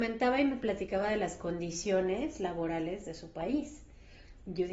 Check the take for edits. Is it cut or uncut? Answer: uncut